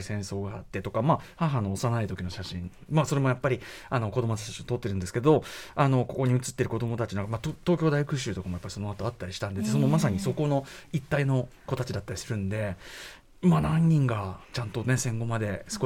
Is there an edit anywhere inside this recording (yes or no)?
yes